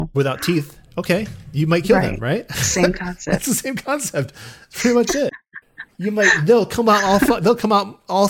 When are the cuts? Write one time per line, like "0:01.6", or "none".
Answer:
none